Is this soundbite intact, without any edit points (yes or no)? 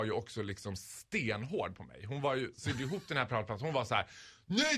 yes